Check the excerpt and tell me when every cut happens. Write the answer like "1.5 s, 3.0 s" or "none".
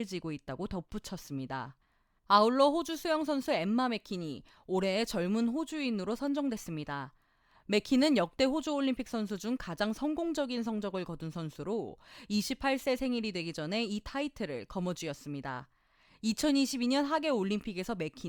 none